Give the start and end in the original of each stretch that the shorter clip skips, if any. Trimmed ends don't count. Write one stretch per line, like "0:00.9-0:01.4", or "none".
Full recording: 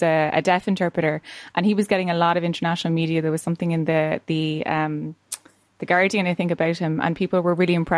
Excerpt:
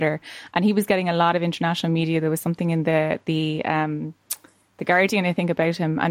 none